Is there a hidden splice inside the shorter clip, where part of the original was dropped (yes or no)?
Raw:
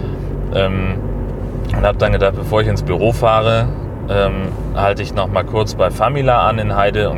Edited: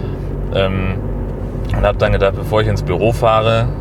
no